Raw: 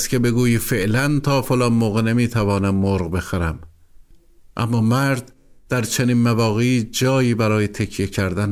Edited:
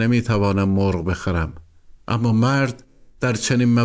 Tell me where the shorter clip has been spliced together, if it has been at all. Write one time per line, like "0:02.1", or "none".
0:02.0